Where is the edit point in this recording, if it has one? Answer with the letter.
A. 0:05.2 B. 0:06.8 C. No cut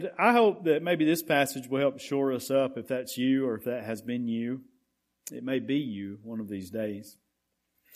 C